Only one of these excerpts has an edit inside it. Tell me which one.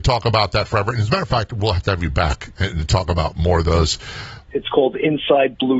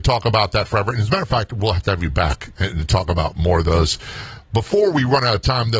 first; 1 cut; at 4.5 s

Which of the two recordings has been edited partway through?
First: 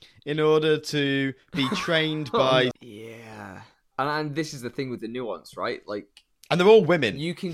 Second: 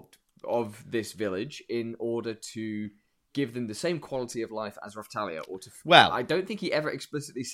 first; 1 cut; at 2.7 s

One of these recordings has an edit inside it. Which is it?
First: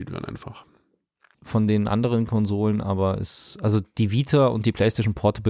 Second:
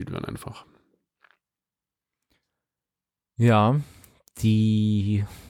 first; 1 cut; at 1.3 s

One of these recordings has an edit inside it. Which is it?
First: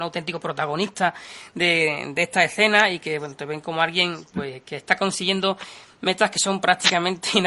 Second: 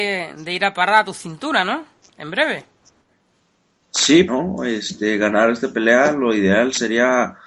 second; 1 cut; at 4.3 s

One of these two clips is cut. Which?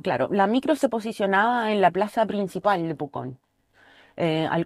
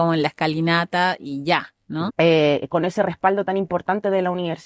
second; 1 cut; at 2.1 s

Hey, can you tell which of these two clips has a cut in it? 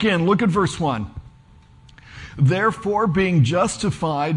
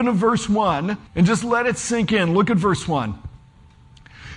second; 1 cut; at 1.1 s

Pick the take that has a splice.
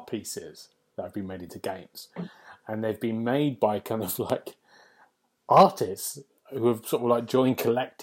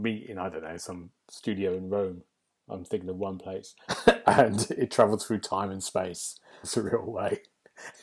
second; 2 cuts; at 3.9 s, 6.6 s

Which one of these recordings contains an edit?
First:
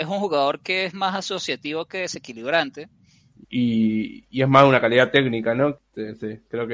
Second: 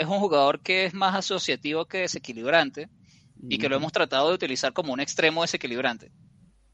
first; 2 cuts; at 3.4 s, 5.8 s

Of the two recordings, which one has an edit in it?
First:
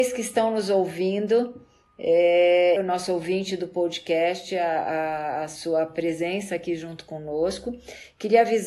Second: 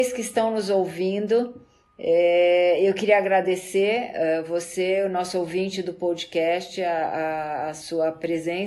first; 1 cut; at 2.8 s

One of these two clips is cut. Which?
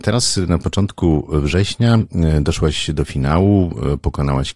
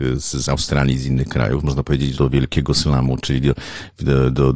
second; 1 cut; at 2.1 s

